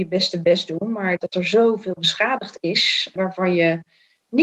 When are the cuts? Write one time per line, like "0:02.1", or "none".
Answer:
0:03.2